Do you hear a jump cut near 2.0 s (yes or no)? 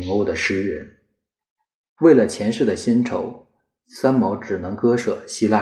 yes